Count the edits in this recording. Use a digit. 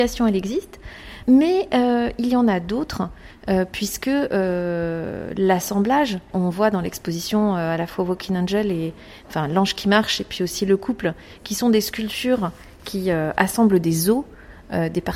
1